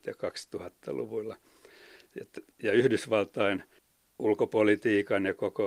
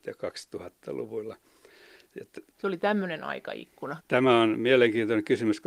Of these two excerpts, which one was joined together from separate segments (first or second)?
second